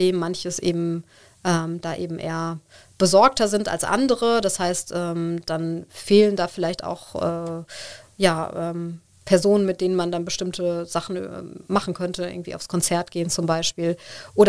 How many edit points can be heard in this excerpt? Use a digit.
0